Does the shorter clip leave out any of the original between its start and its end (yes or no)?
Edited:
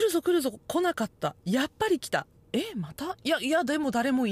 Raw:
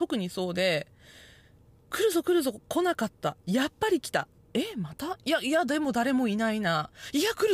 no